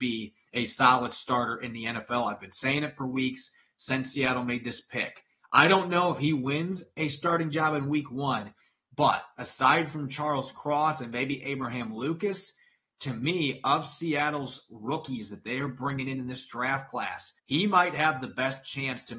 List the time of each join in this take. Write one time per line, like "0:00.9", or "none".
0:17.4